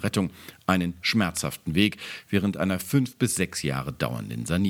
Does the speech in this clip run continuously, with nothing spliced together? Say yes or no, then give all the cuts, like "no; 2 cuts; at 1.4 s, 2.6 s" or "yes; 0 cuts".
no; 1 cut; at 1.0 s